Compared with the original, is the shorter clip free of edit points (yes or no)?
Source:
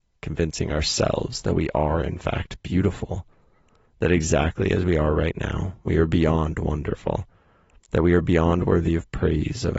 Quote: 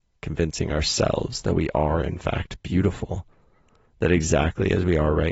yes